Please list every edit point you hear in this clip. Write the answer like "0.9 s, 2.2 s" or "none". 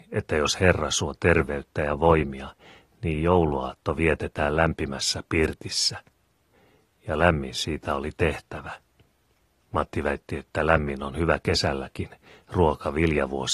none